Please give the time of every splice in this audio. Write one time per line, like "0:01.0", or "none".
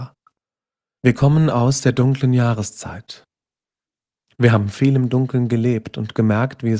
0:01.0